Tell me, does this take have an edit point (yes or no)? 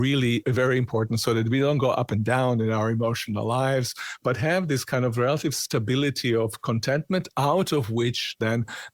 no